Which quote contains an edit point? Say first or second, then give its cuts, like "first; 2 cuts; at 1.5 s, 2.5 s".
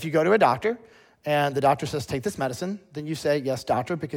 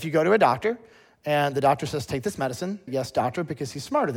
second; 1 cut; at 2.9 s